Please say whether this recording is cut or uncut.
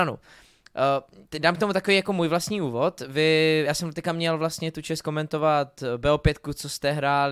uncut